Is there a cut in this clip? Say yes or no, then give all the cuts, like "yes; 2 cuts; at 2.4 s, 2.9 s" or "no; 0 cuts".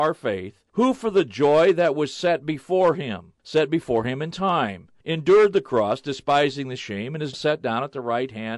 yes; 1 cut; at 7.3 s